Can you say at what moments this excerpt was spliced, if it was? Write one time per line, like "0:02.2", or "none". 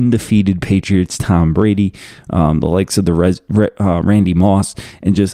none